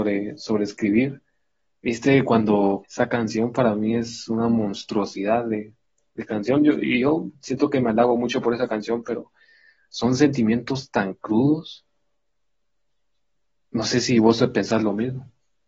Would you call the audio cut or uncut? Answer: cut